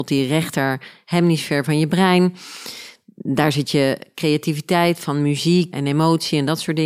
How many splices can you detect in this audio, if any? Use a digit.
1